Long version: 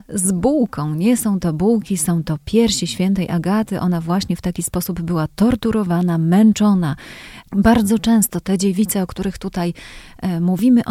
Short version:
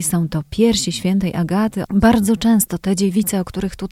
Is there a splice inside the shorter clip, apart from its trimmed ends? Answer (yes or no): yes